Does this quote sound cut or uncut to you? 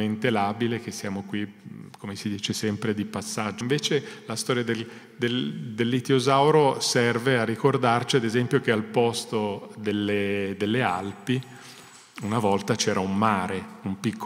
cut